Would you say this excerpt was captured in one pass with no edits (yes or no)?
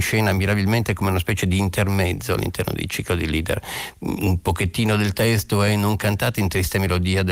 yes